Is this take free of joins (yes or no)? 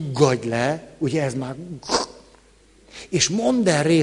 yes